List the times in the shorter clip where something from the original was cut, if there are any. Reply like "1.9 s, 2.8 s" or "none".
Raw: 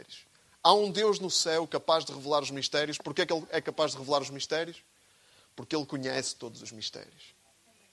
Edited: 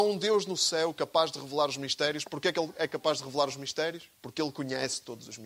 4.1 s